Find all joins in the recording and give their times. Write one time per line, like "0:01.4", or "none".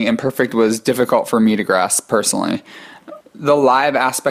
0:03.2